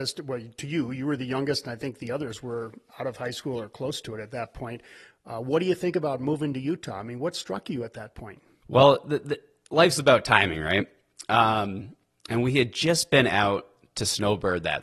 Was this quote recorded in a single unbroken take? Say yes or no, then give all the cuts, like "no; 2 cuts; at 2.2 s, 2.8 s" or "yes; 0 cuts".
yes; 0 cuts